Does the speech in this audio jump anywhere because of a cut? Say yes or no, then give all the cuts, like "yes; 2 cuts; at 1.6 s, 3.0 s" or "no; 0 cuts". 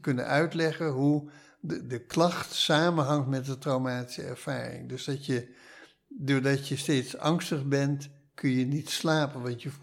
yes; 1 cut; at 1.8 s